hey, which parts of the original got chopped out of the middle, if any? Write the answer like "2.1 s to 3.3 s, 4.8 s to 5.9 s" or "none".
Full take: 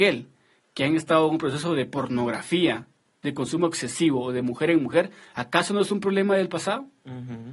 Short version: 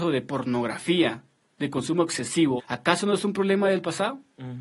4.2 s to 5.3 s